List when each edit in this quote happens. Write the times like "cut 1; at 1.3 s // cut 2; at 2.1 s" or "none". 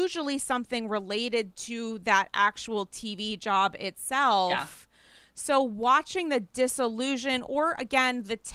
none

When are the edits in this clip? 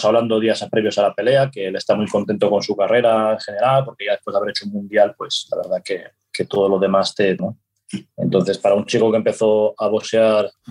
cut 1; at 7.4 s

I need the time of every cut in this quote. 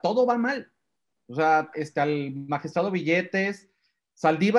cut 1; at 1.7 s

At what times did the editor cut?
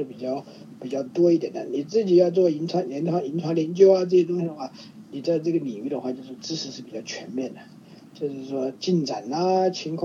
none

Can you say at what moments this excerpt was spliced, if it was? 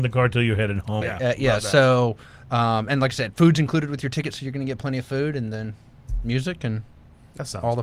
cut 1; at 1.0 s

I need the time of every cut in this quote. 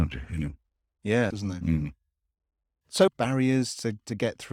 cut 1; at 1.3 s // cut 2; at 3.1 s

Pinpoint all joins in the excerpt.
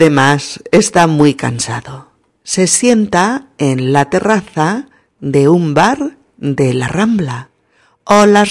none

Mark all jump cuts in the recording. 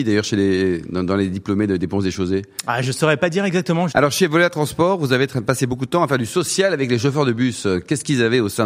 cut 1; at 3.9 s

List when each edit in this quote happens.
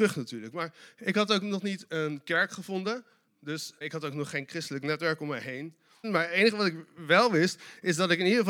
cut 1; at 3.8 s // cut 2; at 6.0 s

